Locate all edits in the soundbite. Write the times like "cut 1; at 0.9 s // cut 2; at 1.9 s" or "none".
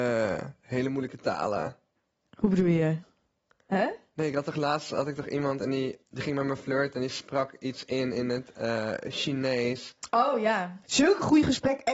cut 1; at 6.0 s // cut 2; at 10.8 s